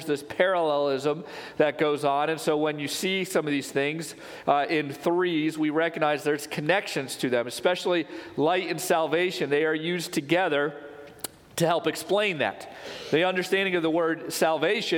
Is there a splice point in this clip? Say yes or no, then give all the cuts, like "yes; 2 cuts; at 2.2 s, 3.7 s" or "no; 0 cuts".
no; 0 cuts